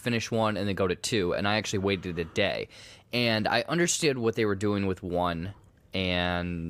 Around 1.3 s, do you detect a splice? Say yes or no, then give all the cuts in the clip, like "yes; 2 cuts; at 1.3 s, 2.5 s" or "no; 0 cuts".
no; 0 cuts